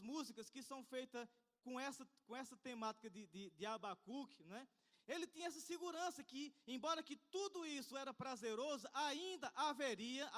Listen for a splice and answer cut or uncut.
cut